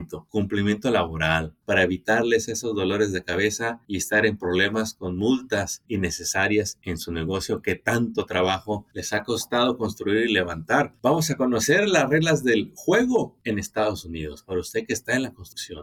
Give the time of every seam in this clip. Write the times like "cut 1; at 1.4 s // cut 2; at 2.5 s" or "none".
cut 1; at 1.6 s